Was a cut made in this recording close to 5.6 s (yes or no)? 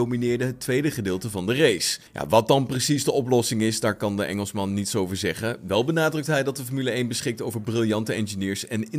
no